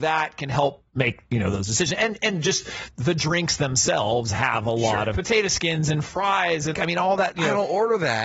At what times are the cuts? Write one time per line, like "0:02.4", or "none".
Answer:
0:05.1
0:06.7